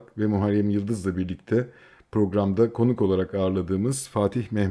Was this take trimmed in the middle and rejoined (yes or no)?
no